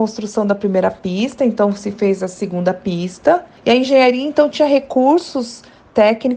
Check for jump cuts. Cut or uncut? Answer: uncut